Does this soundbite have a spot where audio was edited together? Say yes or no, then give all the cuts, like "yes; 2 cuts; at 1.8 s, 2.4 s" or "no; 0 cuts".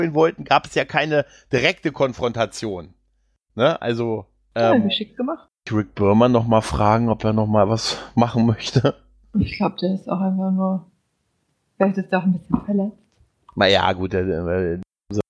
yes; 1 cut; at 5.5 s